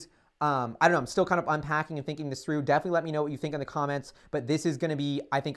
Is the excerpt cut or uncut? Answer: uncut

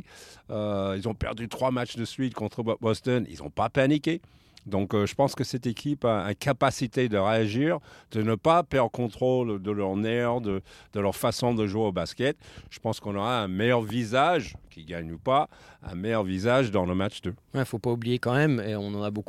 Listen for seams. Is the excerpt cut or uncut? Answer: uncut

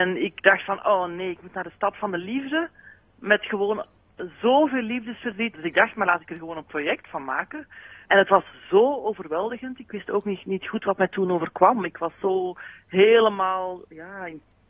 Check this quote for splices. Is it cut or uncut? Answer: cut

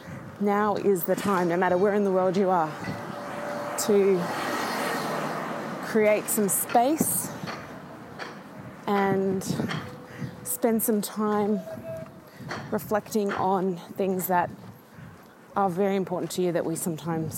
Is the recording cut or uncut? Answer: uncut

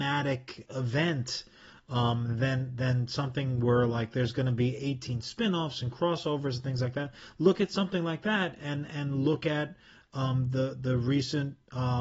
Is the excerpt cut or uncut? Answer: uncut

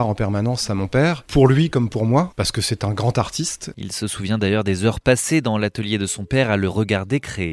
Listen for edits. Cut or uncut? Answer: uncut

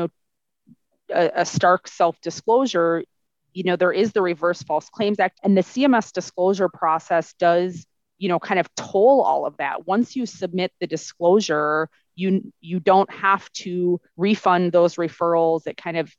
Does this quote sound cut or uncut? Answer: cut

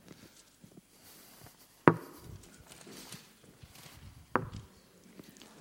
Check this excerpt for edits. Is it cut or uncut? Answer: uncut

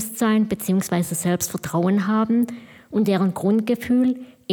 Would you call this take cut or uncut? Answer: uncut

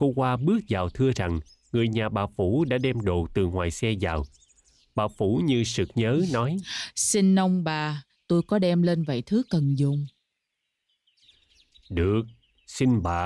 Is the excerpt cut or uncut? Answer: cut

